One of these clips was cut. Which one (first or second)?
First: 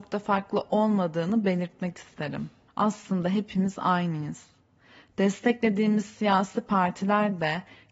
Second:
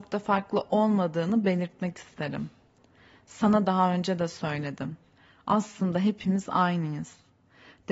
first